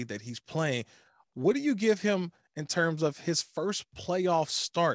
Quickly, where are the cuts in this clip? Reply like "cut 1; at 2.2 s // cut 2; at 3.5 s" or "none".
none